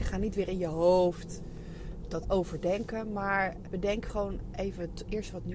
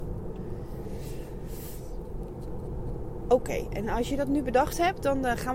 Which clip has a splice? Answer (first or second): first